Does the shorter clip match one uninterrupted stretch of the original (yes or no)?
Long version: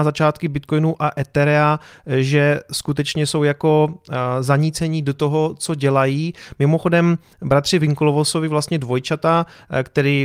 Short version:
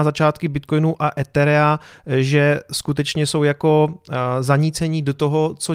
yes